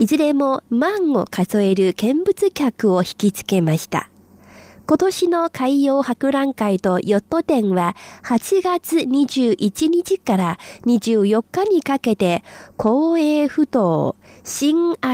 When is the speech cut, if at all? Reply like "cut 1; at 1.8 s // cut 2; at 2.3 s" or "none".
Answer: none

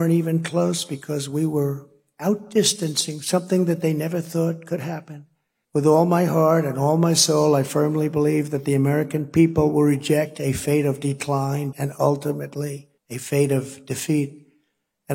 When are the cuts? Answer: cut 1; at 5.6 s // cut 2; at 11.7 s // cut 3; at 13.0 s

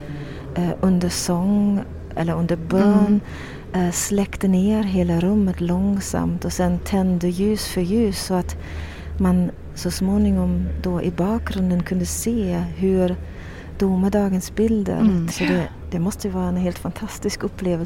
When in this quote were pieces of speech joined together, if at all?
cut 1; at 2.2 s // cut 2; at 15.3 s

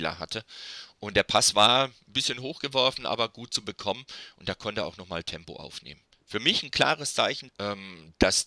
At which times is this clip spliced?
cut 1; at 7.5 s

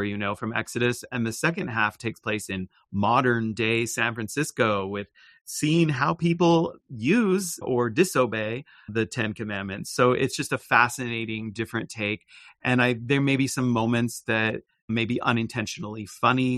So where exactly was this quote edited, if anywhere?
none

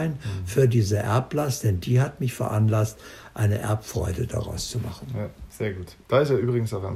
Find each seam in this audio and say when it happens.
cut 1; at 6.0 s

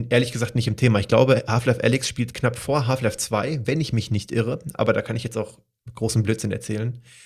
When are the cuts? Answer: none

